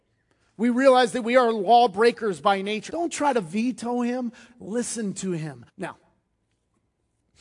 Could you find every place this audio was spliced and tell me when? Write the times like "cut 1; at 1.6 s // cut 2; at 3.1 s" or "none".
cut 1; at 2.9 s // cut 2; at 4.5 s // cut 3; at 5.7 s